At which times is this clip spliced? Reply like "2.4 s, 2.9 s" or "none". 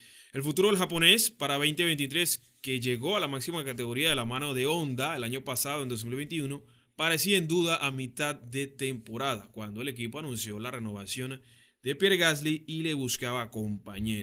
none